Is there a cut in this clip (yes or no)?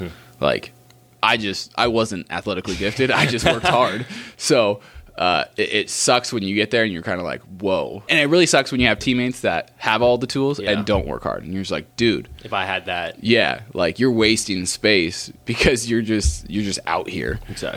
yes